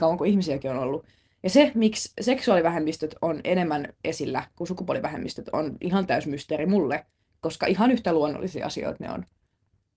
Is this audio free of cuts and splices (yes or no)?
yes